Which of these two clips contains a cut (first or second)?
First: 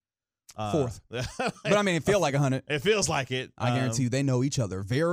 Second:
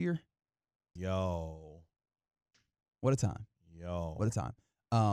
second